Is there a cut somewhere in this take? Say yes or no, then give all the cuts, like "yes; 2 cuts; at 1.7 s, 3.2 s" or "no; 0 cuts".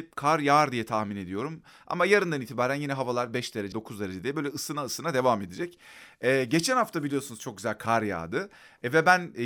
yes; 1 cut; at 3.7 s